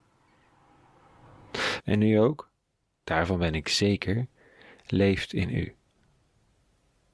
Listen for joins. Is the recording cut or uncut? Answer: cut